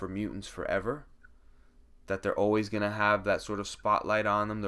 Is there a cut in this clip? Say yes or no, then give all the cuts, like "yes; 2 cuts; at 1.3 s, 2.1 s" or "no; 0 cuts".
no; 0 cuts